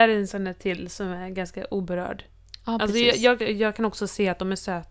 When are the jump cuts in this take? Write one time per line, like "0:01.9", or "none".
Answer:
0:03.4

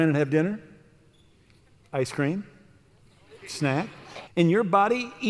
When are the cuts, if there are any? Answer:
0:04.3

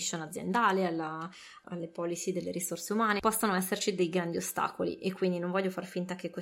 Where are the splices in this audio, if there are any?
0:01.6
0:03.2

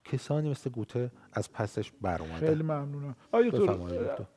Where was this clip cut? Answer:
0:03.2

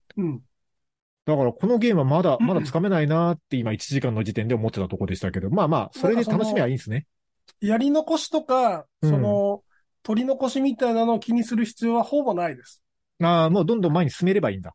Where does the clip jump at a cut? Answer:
none

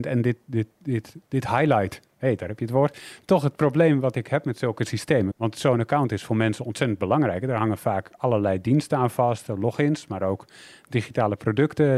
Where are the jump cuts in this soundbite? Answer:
0:05.3

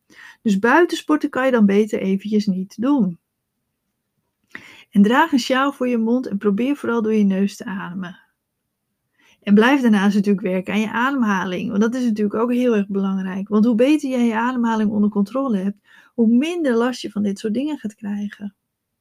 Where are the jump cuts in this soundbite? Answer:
none

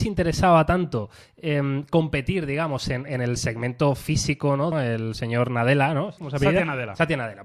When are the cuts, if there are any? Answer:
0:04.7
0:06.2

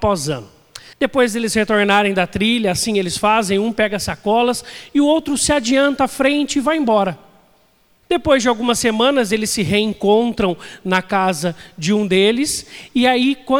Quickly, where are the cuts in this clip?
0:00.9
0:08.0

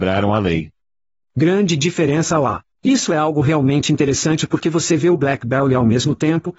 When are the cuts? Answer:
0:01.2
0:02.8

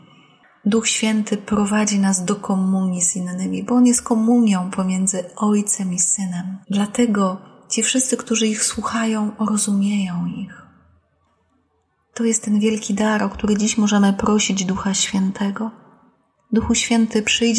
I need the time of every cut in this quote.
0:06.6

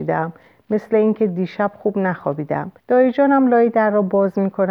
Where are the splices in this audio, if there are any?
0:02.8

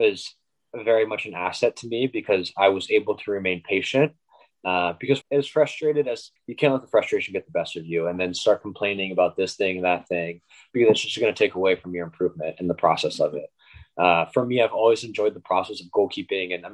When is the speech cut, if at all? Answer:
0:05.2
0:06.4

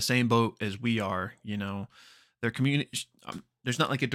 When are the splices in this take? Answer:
none

